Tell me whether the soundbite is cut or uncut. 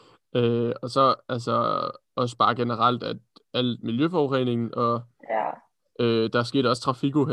uncut